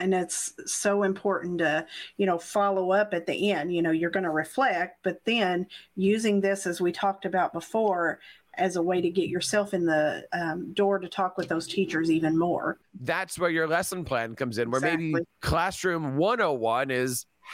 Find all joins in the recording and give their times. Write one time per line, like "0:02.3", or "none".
0:12.8
0:15.2